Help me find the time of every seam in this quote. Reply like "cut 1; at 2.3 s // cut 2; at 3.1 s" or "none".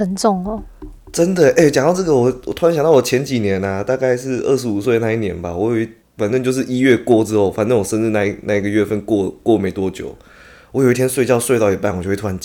none